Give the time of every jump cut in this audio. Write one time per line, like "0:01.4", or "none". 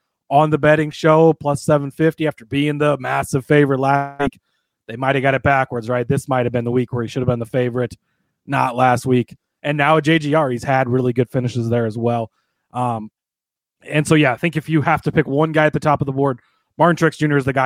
0:09.6

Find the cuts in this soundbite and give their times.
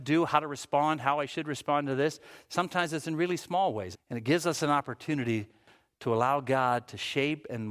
0:03.9

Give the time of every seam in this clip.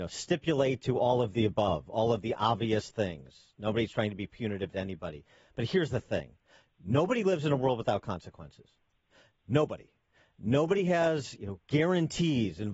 none

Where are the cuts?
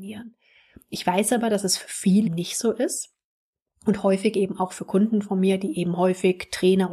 0:02.2

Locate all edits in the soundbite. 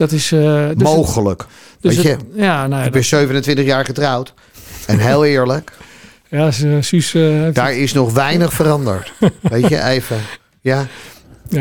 none

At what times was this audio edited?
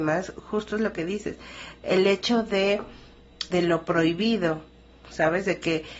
0:03.5

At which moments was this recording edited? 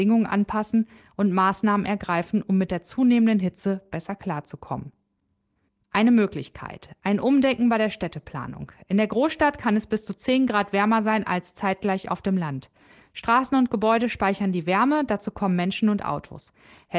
none

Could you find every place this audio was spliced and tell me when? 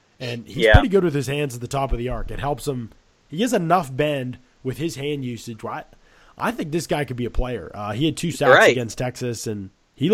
none

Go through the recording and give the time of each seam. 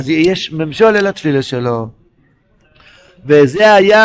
none

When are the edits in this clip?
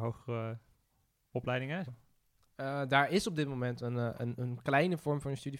0:01.9

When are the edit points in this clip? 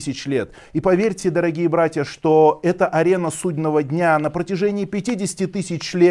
none

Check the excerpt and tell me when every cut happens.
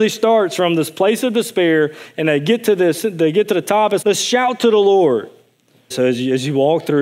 0:04.0
0:05.9

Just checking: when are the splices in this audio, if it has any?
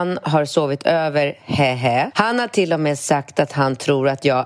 0:02.1

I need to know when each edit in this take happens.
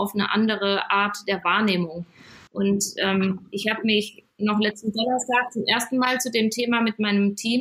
0:02.5

